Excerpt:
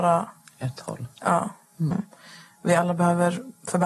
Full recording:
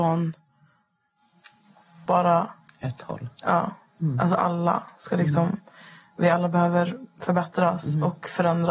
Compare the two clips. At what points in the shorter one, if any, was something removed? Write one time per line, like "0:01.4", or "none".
0:01.9